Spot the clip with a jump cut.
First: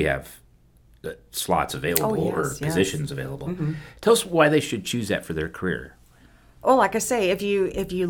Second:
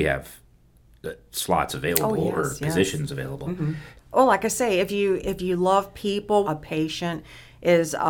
second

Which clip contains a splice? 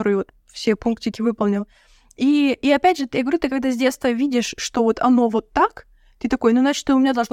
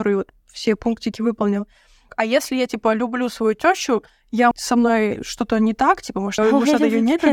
second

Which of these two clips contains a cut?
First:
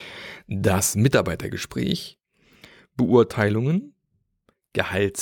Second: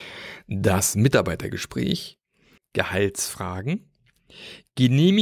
second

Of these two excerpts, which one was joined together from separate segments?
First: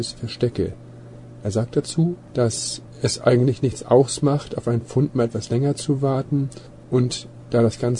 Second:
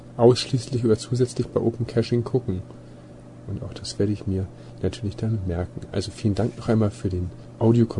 second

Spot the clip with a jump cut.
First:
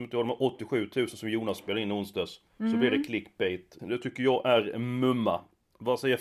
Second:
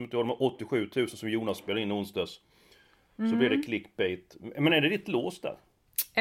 first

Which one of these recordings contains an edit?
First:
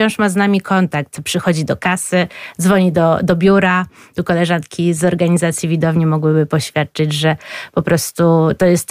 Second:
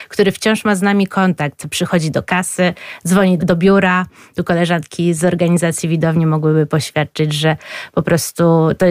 second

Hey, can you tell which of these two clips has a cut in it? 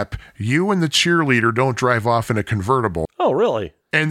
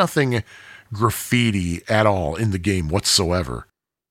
first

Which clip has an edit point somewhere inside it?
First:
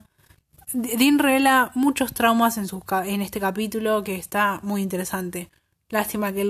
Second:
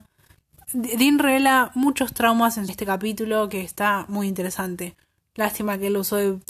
second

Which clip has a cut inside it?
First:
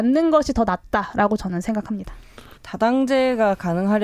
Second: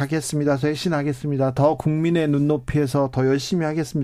first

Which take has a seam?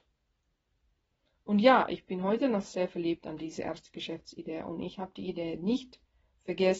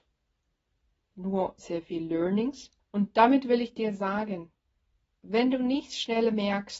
second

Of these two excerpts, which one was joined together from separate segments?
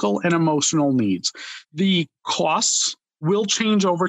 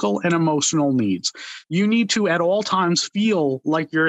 first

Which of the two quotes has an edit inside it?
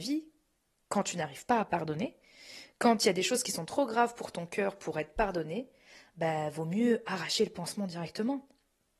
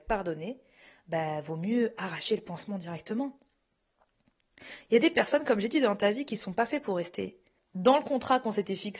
second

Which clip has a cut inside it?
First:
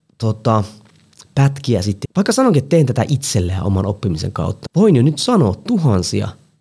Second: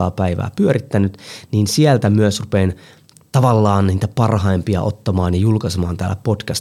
first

